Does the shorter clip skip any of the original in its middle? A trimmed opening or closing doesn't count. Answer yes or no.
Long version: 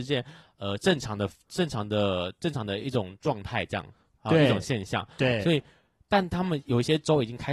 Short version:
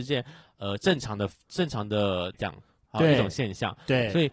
yes